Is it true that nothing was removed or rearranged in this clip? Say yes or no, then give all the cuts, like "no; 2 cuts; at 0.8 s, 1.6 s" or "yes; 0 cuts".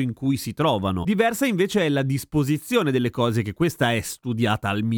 yes; 0 cuts